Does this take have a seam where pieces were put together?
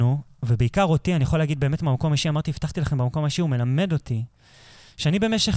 no; 0 cuts

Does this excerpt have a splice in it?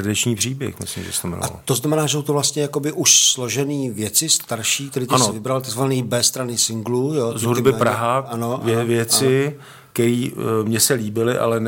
no; 0 cuts

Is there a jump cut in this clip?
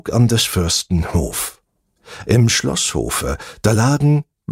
no; 0 cuts

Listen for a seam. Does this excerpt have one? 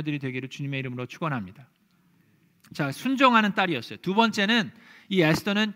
no; 0 cuts

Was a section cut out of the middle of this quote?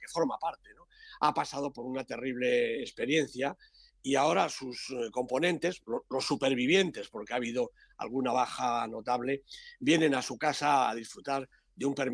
no; 0 cuts

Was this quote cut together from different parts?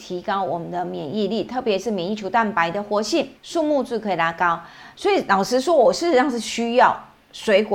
yes; 2 cuts; at 3.4 s, 4.9 s

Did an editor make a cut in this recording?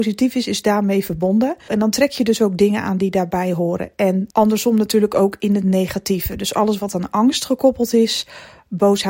yes; 2 cuts; at 1.7 s, 4.3 s

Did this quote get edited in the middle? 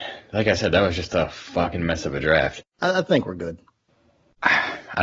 yes; 1 cut; at 2.6 s

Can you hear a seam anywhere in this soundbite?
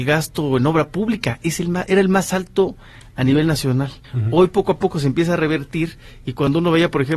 yes; 1 cut; at 4.0 s

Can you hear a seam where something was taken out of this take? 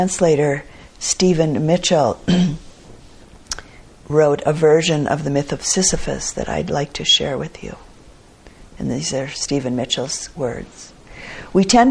no; 0 cuts

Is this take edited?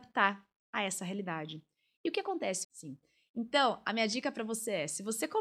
yes; 1 cut; at 2.6 s

